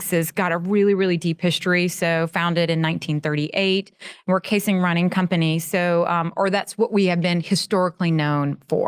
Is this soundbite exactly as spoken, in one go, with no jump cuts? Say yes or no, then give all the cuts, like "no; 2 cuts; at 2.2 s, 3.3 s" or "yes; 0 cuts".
yes; 0 cuts